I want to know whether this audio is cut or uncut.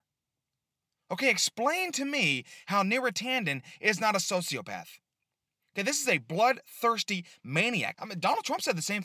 cut